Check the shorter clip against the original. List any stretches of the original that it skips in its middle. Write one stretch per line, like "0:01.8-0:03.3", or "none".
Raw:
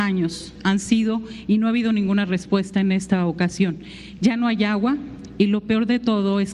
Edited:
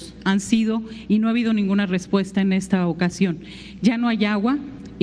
none